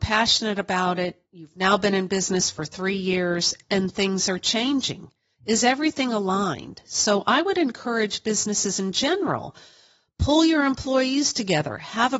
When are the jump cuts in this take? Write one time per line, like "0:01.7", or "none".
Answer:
none

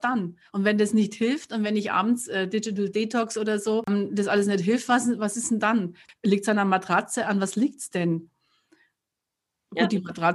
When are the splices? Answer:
none

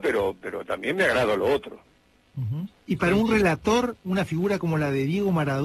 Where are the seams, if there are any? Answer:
0:02.7

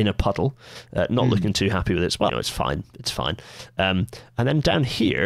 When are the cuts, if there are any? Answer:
0:02.3

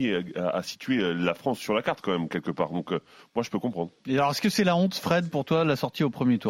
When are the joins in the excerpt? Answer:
none

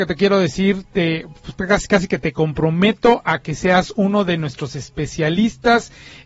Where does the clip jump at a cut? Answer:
none

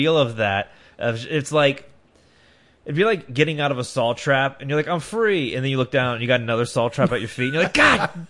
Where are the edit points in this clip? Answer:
none

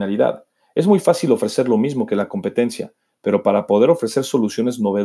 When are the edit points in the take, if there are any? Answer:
none

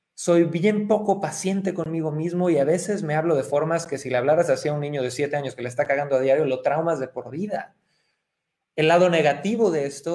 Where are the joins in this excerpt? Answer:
none

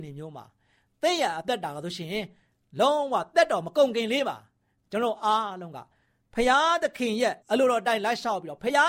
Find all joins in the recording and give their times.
0:07.4

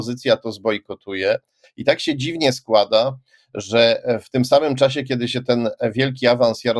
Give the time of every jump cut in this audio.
0:01.6

